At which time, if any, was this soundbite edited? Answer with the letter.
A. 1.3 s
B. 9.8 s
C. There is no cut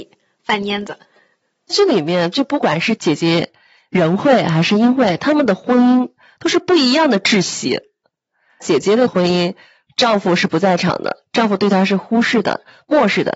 C